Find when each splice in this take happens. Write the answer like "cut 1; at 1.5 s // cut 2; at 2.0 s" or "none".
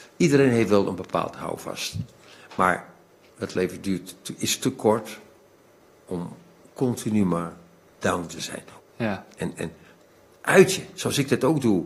cut 1; at 8.8 s